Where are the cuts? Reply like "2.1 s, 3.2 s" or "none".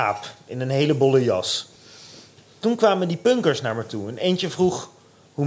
none